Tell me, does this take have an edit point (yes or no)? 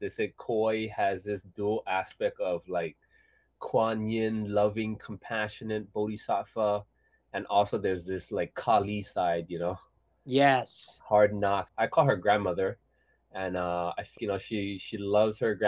yes